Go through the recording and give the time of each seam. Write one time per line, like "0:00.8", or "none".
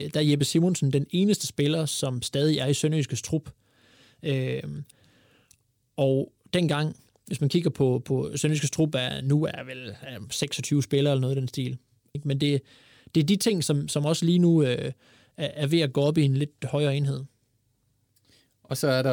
0:12.1